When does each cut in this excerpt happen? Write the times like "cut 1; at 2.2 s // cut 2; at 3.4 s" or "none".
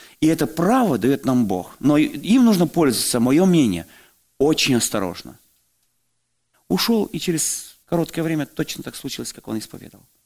cut 1; at 6.5 s // cut 2; at 7.8 s